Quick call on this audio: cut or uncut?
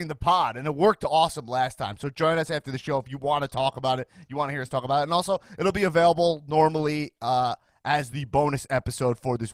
uncut